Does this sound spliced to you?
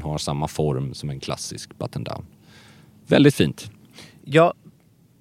no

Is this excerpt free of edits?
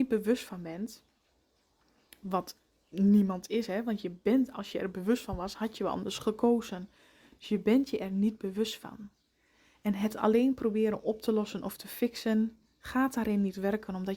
yes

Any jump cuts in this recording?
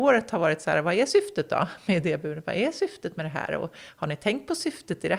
no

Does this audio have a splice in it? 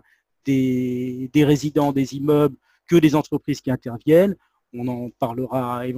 no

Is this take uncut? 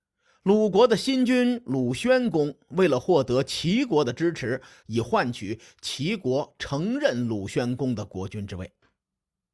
no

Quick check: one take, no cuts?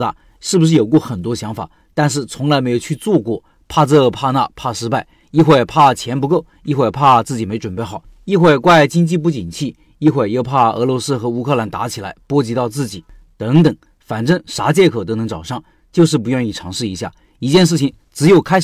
yes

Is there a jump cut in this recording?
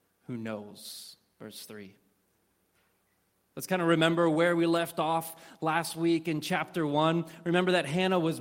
no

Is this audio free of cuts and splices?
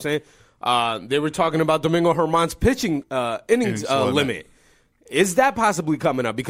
no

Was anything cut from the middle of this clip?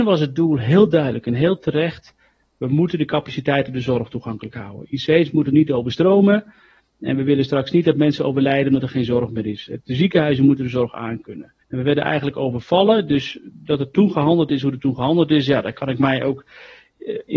yes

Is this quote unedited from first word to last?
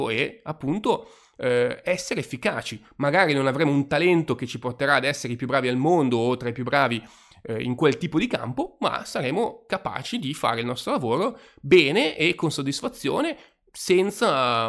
yes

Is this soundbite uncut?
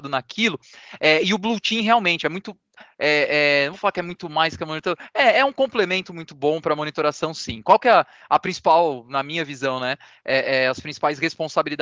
yes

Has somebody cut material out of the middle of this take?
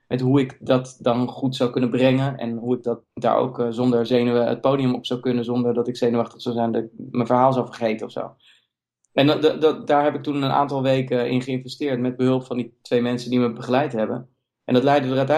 no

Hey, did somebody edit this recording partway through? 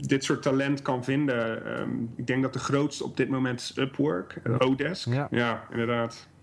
yes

